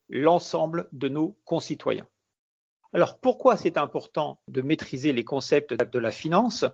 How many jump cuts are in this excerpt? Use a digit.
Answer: 1